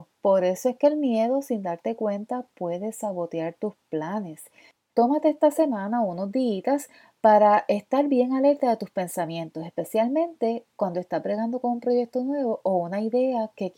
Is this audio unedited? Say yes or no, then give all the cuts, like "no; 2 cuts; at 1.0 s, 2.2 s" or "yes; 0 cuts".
no; 1 cut; at 4.9 s